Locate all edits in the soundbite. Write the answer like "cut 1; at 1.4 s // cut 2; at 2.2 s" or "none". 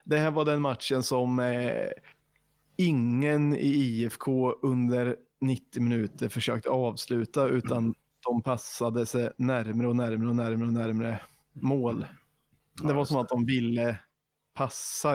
none